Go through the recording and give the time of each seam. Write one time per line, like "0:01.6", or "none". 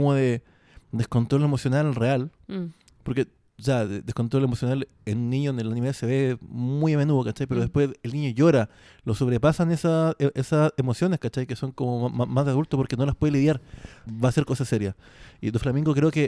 0:14.1